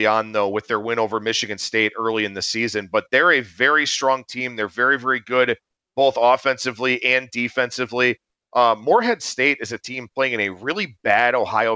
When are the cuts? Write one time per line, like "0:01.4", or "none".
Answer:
none